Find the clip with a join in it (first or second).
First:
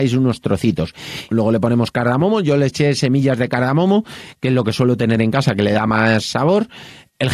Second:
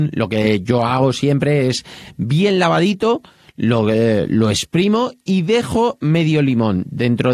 first